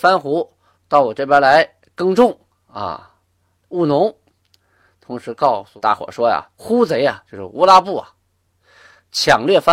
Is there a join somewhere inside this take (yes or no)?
no